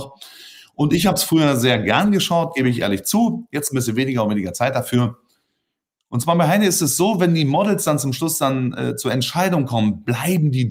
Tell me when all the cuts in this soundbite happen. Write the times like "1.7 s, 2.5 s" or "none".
none